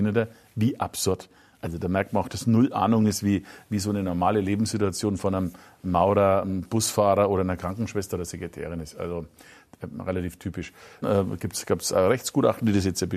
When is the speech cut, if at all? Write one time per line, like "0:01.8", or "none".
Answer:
0:11.0

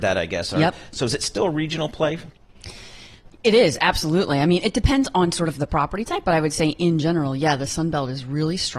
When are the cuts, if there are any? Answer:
none

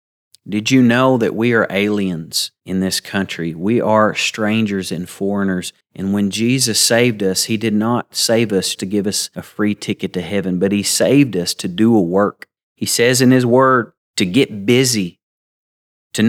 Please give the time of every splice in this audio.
0:05.8
0:08.8
0:14.0

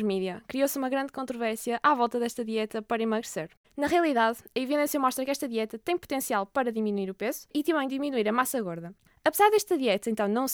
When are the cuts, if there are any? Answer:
0:03.6
0:09.1

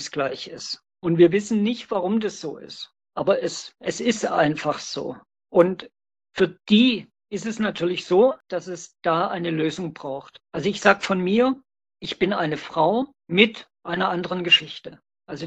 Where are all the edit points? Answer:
none

